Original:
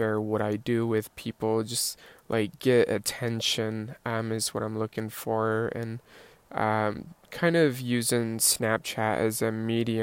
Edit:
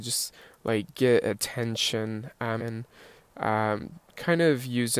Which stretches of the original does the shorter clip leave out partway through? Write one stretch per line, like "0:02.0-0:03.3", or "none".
0:04.2-0:05.7